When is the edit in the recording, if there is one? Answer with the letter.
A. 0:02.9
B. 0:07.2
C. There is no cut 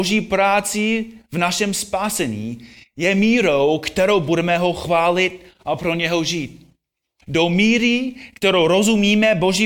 B